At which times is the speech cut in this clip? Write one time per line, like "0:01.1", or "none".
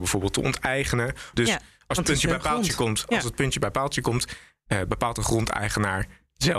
0:01.3